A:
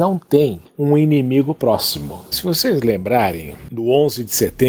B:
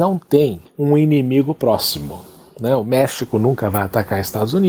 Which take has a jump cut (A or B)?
A